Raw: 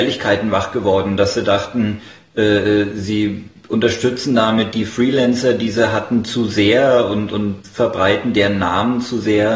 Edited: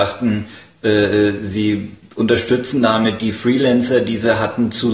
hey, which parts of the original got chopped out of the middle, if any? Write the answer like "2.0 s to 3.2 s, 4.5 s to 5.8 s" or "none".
none